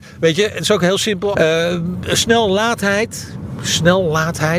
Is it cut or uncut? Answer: cut